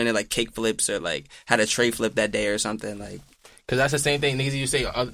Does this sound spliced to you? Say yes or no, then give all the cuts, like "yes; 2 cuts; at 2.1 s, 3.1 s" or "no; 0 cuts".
no; 0 cuts